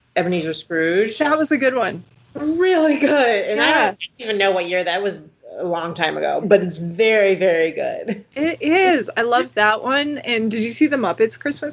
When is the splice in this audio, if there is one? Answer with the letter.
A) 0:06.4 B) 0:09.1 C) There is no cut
A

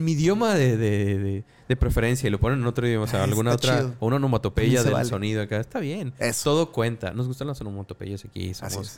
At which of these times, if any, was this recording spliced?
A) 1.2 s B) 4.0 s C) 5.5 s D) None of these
D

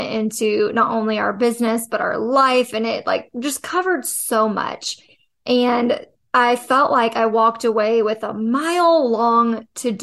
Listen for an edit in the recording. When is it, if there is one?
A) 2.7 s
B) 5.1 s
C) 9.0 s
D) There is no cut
D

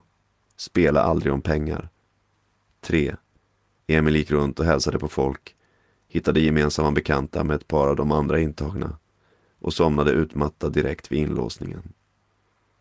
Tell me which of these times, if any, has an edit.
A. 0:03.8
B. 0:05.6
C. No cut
A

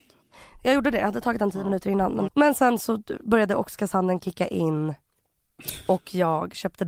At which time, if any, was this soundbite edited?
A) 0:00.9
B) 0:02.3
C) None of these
B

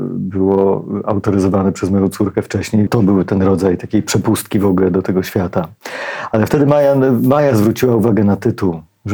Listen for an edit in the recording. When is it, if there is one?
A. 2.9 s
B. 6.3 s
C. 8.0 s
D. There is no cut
A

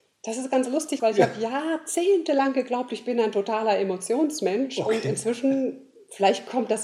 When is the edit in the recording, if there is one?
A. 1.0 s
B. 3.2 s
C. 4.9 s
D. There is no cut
A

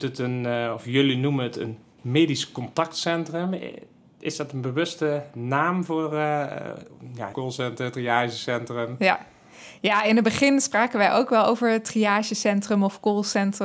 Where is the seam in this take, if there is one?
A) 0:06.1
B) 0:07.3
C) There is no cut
B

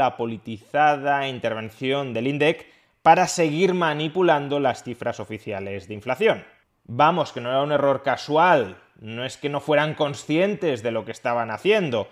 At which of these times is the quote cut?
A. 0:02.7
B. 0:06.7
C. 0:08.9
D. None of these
D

